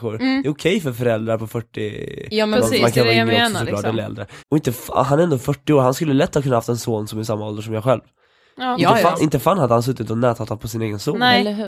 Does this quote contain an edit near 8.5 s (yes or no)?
no